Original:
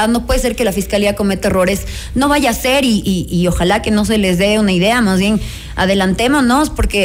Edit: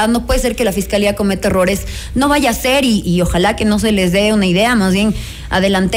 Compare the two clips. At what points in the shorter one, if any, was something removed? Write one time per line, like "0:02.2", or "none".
0:03.0